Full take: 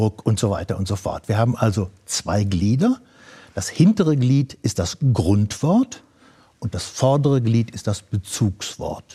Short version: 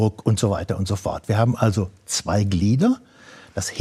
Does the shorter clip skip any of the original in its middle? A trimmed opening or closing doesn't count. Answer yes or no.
no